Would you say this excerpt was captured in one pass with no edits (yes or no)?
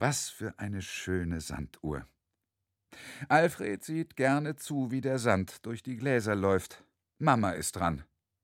no